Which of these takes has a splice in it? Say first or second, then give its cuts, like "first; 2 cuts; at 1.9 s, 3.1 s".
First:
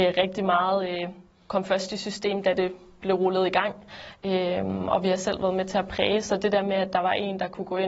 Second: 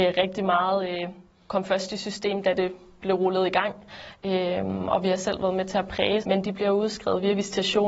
second; 1 cut; at 6.2 s